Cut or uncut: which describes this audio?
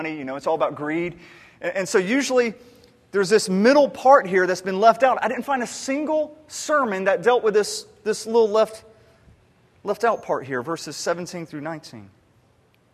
uncut